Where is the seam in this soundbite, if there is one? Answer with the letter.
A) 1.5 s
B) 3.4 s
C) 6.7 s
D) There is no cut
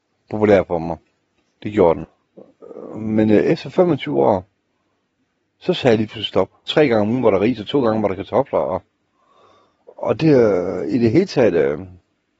C